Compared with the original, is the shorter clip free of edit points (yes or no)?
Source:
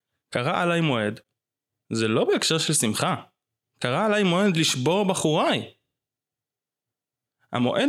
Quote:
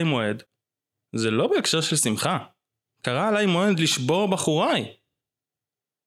yes